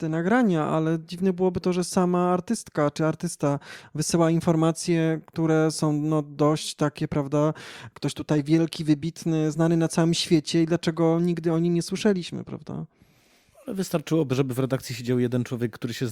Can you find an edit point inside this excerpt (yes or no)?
no